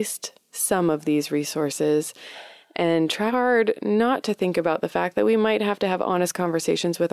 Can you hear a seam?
yes; 1 cut; at 3.3 s

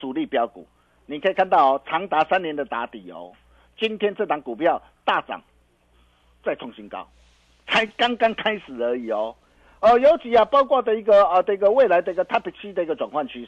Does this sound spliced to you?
no; 0 cuts

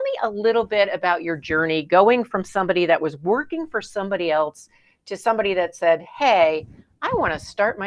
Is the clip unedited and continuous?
yes; 0 cuts

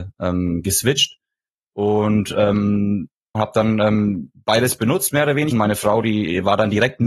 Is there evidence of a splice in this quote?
yes; 2 cuts; at 3.3 s, 5.5 s

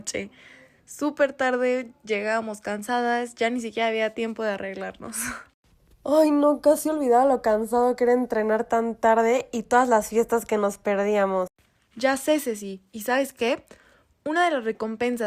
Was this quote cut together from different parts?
no; 0 cuts

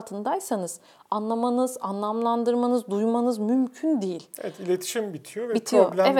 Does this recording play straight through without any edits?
yes; 0 cuts

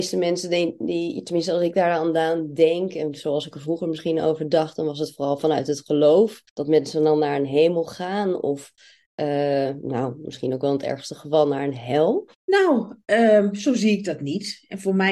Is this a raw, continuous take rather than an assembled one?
no; 2 cuts; at 6.5 s, 12.3 s

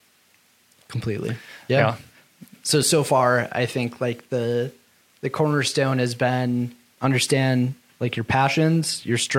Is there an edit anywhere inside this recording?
no; 0 cuts

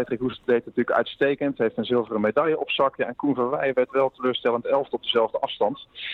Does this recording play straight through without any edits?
yes; 0 cuts

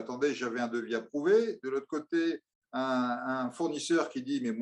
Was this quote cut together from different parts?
no; 0 cuts

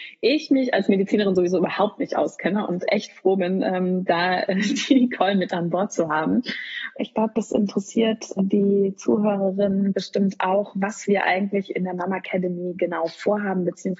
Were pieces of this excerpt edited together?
yes; 2 cuts; at 7.0 s, 8.4 s

